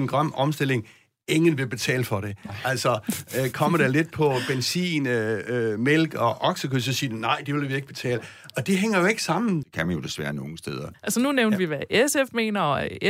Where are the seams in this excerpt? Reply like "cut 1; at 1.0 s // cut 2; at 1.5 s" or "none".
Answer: cut 1; at 9.6 s // cut 2; at 10.9 s